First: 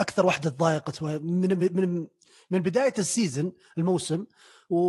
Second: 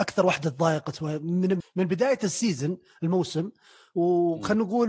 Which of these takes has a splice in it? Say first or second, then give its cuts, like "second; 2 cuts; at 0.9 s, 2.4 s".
second; 1 cut; at 1.6 s